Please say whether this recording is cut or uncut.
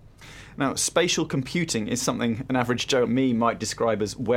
cut